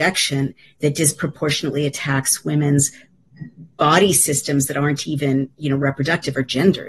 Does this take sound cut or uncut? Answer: uncut